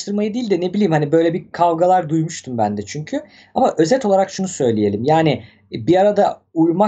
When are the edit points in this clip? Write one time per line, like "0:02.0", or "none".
none